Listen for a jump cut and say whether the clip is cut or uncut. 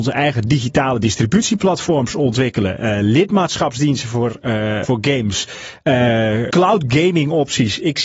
cut